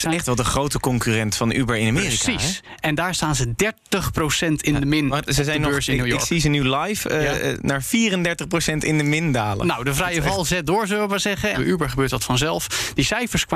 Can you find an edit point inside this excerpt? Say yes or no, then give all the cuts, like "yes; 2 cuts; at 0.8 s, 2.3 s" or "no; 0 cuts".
yes; 1 cut; at 11.5 s